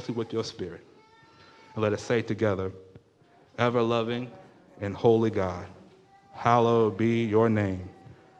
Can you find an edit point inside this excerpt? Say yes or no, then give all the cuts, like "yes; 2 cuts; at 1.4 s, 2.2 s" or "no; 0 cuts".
no; 0 cuts